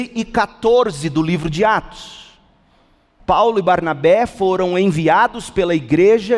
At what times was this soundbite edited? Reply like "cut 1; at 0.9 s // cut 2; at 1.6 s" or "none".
cut 1; at 3.2 s